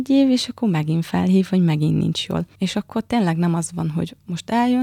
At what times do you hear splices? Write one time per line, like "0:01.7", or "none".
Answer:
0:02.5